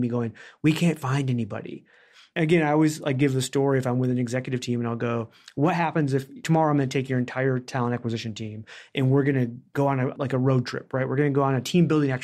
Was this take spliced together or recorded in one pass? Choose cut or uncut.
uncut